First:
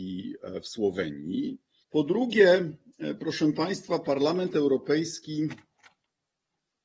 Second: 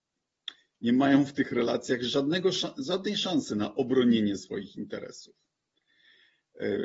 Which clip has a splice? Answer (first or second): first